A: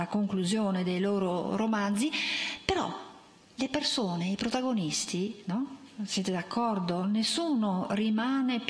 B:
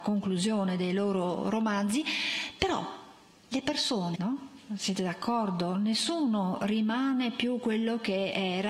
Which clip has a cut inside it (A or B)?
B